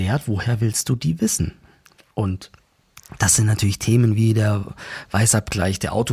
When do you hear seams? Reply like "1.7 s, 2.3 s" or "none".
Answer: none

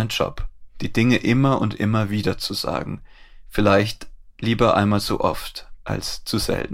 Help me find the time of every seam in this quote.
none

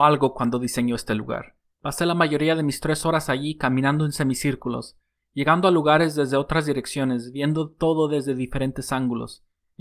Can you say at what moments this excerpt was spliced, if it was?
1.7 s

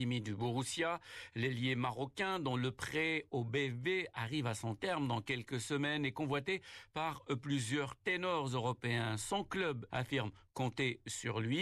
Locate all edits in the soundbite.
9.9 s

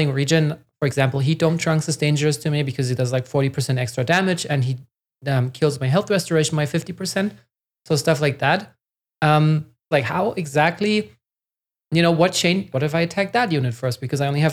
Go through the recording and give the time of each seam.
9.9 s, 12.7 s

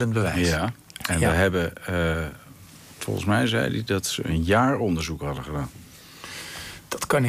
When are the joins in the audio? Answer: none

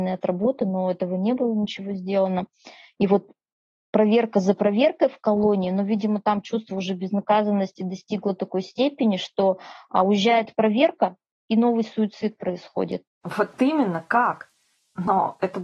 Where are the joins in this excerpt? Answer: 13.1 s

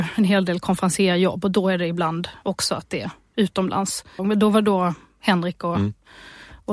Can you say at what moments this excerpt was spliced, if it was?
4.2 s

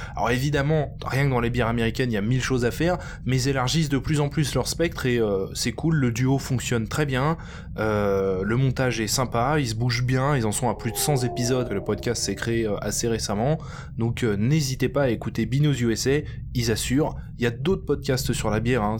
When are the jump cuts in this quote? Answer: 11.6 s

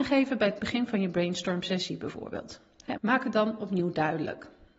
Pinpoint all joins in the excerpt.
3.0 s

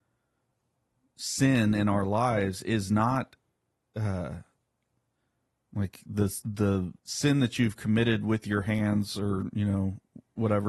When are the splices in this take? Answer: 7.0 s

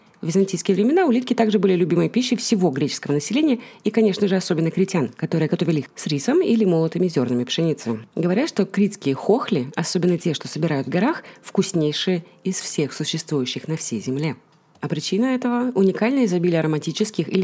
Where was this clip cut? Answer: 5.5 s

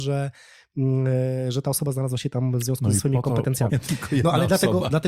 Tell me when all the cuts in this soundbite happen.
3.7 s

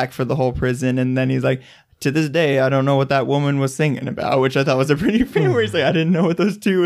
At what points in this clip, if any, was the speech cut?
none

